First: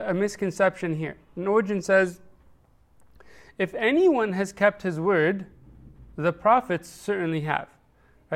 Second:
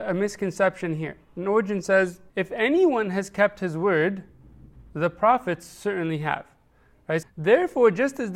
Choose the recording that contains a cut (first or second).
second